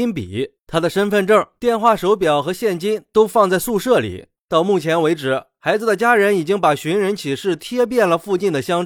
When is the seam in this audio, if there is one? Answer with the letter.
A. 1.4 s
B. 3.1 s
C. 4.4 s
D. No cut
C